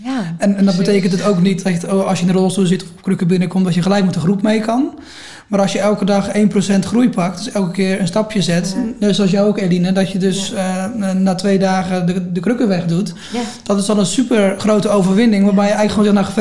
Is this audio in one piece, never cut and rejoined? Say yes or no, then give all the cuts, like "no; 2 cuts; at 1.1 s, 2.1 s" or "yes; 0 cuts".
yes; 0 cuts